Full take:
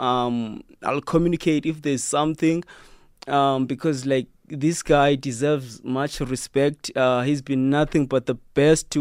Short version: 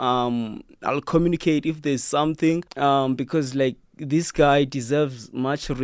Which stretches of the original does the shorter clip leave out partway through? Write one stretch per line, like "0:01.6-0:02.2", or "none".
0:02.7-0:03.2